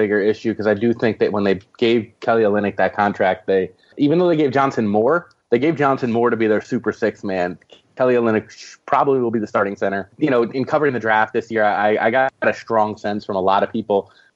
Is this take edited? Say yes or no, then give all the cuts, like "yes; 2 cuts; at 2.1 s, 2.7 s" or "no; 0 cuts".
no; 0 cuts